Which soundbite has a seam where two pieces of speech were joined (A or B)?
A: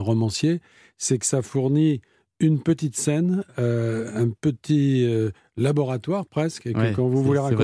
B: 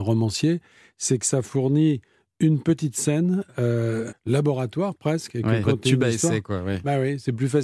B